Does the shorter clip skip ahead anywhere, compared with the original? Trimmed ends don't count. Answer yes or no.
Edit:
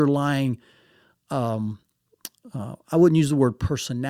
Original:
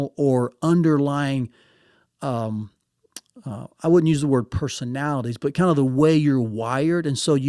no